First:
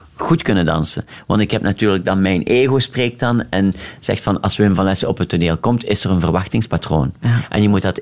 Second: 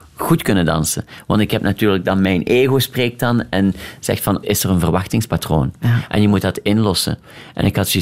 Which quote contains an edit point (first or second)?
second